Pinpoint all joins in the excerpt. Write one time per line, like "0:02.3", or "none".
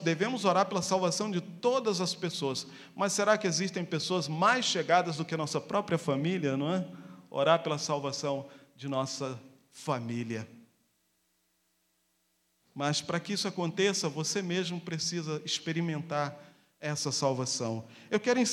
none